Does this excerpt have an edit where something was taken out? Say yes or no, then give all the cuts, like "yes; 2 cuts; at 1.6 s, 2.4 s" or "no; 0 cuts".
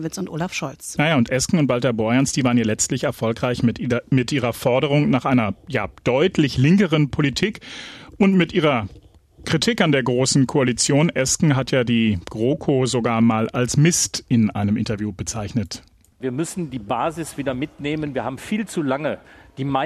no; 0 cuts